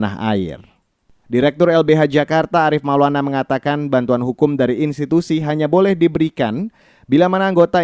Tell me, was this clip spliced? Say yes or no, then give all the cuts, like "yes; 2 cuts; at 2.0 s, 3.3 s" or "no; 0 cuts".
yes; 1 cut; at 1.2 s